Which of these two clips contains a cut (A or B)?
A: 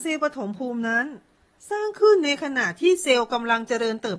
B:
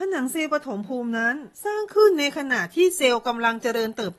B